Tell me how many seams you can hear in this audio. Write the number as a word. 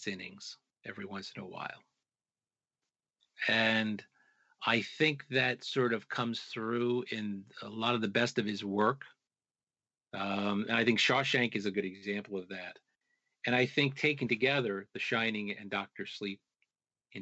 one